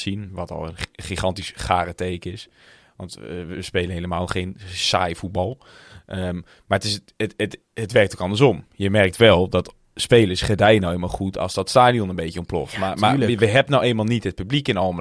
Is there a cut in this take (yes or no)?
no